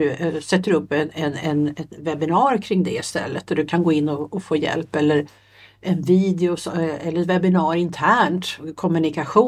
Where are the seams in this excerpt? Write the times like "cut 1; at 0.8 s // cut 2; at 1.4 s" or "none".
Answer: none